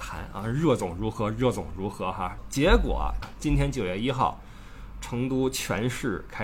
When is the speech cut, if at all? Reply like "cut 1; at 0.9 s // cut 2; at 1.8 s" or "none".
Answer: cut 1; at 3.2 s // cut 2; at 4.9 s

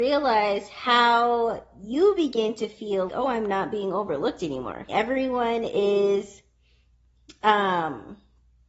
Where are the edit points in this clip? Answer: cut 1; at 3.1 s // cut 2; at 4.9 s

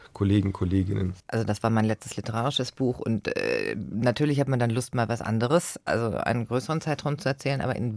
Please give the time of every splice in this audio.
cut 1; at 1.2 s

